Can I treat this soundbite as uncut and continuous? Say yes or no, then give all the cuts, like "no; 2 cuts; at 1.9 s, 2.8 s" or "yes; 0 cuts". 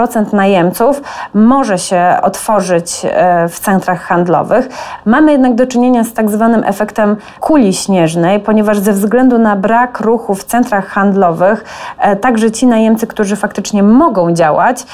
yes; 0 cuts